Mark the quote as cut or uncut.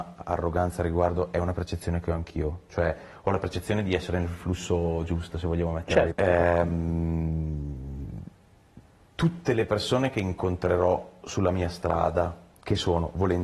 cut